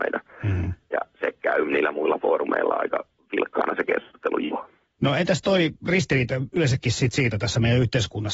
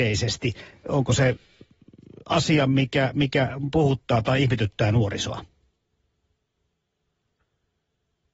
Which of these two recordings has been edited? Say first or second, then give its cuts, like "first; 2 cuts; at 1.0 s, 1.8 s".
first; 1 cut; at 5.0 s